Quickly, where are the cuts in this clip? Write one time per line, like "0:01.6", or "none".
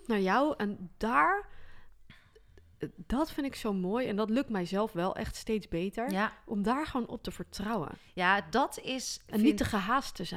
none